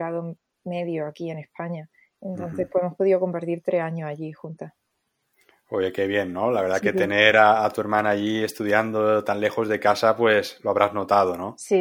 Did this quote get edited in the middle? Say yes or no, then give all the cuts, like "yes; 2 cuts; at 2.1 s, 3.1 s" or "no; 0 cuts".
no; 0 cuts